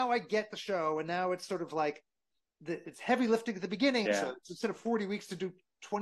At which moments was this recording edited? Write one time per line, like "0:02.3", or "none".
0:04.0